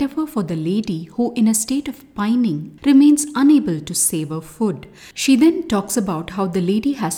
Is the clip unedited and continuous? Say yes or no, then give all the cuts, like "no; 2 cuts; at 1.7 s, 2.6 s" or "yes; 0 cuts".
no; 1 cut; at 2.8 s